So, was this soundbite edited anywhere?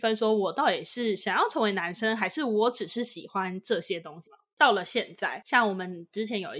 yes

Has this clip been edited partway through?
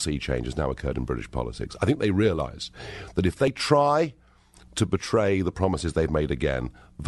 no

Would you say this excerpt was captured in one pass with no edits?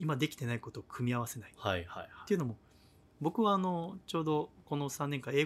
yes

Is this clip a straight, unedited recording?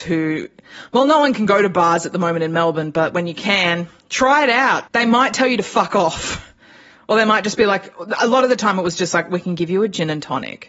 no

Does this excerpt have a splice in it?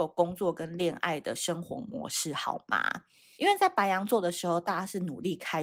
yes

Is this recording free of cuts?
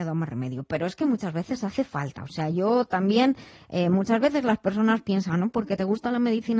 yes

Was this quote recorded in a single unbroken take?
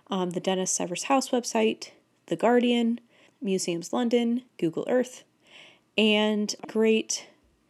no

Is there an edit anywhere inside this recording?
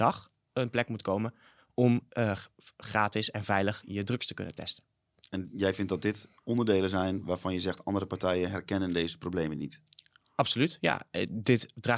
yes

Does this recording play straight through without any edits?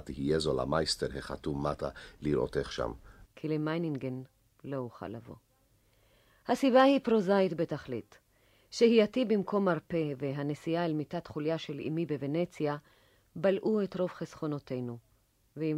no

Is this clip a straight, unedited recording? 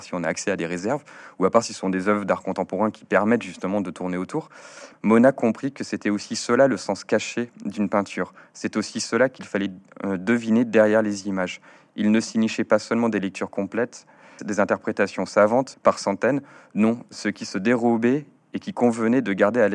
no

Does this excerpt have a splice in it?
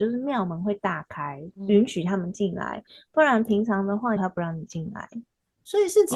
yes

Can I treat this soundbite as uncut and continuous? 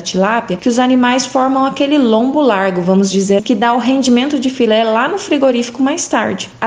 no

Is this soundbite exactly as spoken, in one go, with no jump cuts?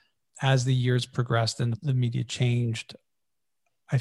no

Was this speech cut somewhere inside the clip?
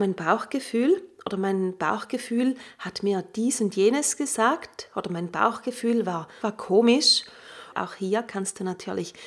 yes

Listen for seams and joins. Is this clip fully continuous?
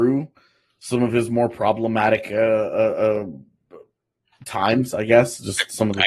yes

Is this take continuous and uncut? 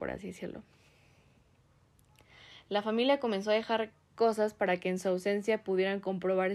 yes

